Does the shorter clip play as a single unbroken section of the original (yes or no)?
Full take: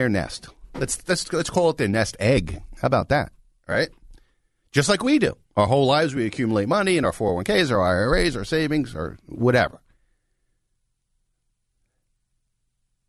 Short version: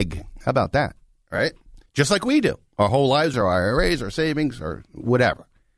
no